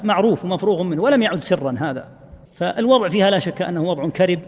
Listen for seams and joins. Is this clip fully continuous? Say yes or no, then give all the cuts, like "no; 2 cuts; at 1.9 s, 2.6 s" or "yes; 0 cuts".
no; 1 cut; at 2.4 s